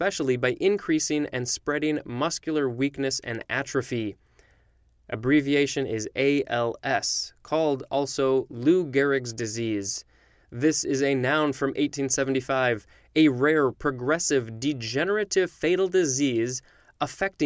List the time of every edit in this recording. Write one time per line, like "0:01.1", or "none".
0:10.4